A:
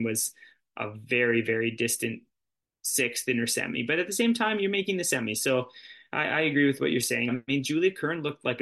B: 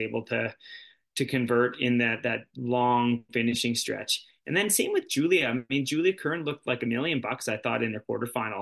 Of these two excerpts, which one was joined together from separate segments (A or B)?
A